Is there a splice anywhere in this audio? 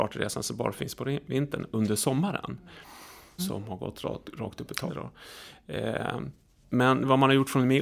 yes; 2 cuts; at 3.4 s, 4.9 s

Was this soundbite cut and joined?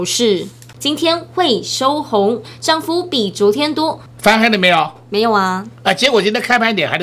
yes; 1 cut; at 4.1 s

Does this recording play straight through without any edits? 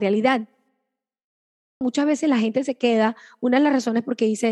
no; 1 cut; at 1.8 s

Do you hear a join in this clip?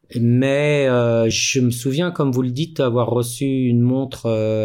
no; 0 cuts

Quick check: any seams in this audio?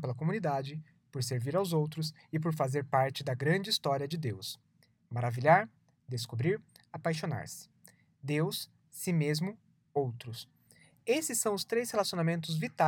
no; 0 cuts

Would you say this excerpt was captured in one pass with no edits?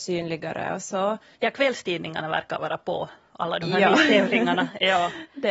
no; 1 cut; at 1.4 s

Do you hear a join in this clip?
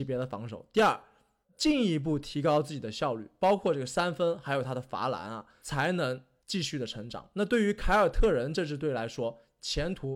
no; 0 cuts

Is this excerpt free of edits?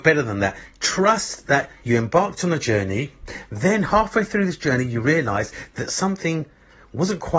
yes; 0 cuts

